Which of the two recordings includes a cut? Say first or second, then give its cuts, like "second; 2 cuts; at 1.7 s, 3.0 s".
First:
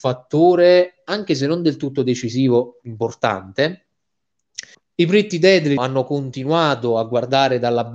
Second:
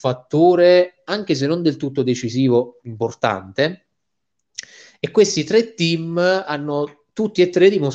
first; 2 cuts; at 4.7 s, 5.8 s